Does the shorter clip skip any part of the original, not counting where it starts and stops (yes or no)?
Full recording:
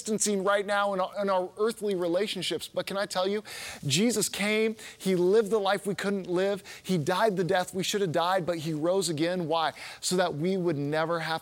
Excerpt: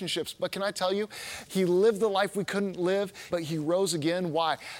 yes